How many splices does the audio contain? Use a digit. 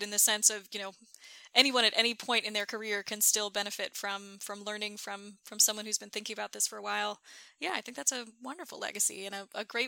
0